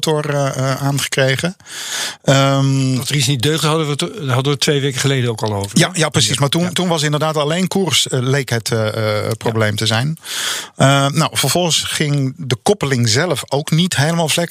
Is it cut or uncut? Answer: uncut